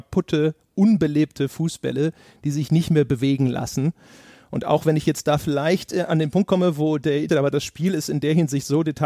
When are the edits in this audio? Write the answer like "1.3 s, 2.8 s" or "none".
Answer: 7.3 s